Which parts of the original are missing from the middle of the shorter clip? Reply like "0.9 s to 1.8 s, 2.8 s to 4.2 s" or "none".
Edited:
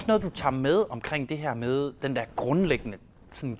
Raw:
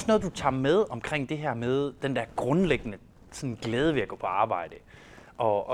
none